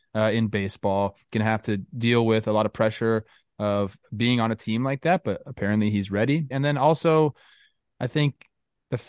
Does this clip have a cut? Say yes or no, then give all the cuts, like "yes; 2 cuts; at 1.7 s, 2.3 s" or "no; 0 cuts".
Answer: yes; 1 cut; at 6.5 s